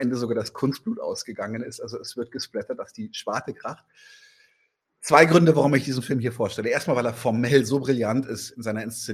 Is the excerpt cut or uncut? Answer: uncut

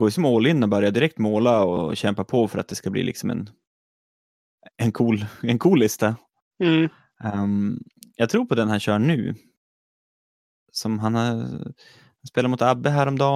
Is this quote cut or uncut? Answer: uncut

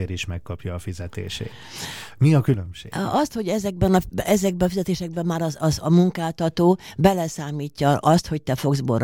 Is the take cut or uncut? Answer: uncut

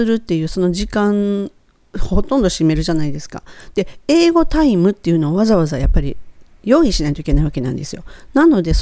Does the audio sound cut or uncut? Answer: uncut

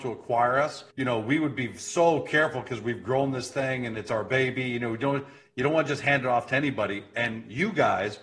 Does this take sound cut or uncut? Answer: cut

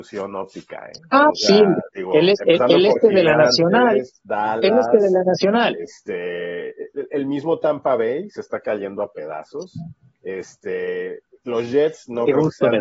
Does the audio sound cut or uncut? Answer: uncut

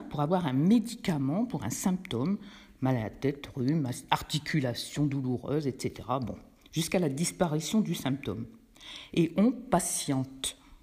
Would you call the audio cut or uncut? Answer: uncut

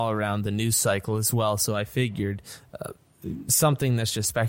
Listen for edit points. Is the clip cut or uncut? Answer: uncut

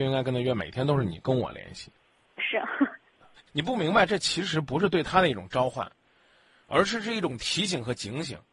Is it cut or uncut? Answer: cut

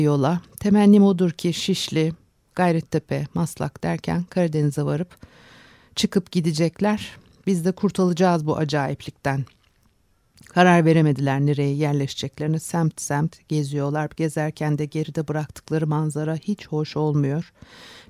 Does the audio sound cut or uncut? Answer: uncut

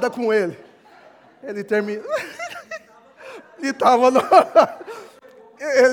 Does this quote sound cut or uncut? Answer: uncut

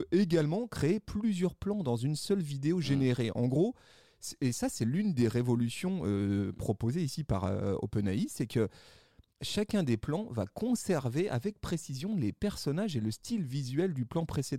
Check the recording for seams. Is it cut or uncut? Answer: uncut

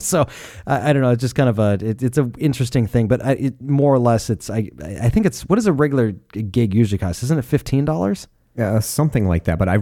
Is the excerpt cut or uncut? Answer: uncut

